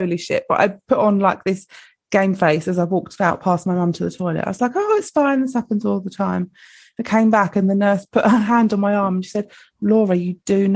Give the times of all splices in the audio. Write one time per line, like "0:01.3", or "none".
none